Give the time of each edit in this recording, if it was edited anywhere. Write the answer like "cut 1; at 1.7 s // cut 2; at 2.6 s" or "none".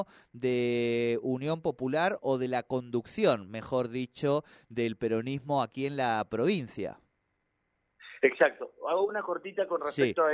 none